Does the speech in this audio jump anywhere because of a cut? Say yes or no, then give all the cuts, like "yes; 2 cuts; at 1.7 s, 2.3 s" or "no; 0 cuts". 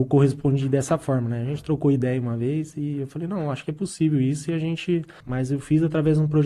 yes; 1 cut; at 5.2 s